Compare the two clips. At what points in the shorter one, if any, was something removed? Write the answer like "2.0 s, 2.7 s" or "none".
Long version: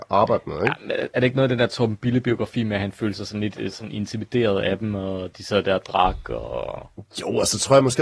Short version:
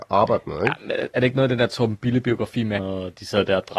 2.8 s